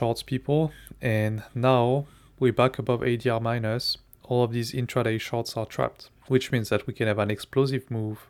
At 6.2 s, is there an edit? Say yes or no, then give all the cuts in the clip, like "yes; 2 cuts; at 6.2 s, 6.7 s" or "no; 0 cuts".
yes; 2 cuts; at 4.2 s, 6.2 s